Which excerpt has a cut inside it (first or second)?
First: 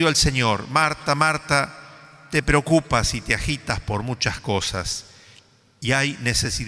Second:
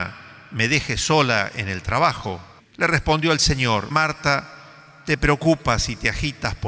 second